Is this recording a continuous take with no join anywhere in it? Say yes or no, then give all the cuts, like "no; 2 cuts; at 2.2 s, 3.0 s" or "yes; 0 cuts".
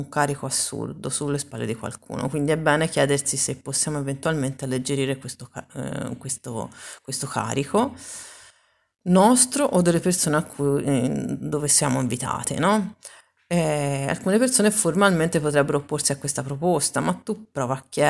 yes; 0 cuts